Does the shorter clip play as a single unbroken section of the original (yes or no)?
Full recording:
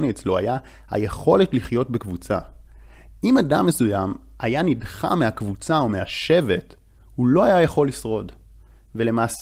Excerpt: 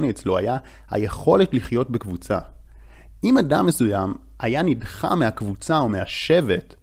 yes